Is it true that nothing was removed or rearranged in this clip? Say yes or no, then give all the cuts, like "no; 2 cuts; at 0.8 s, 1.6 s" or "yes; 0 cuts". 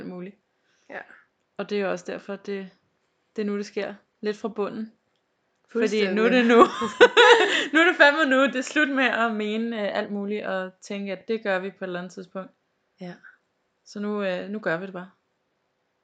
yes; 0 cuts